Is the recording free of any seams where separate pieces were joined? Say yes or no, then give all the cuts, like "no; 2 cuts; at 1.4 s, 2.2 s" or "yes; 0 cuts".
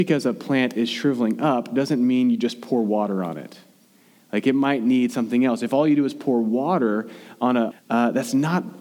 no; 1 cut; at 7.7 s